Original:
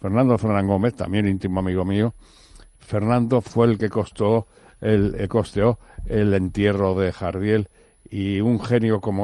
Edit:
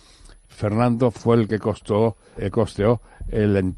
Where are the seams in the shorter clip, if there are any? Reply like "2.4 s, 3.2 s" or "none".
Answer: 2.4 s